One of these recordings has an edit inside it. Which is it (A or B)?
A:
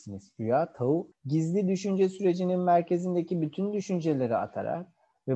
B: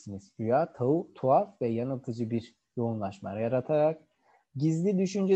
A